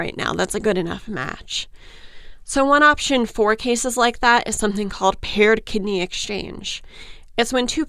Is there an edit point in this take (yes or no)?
no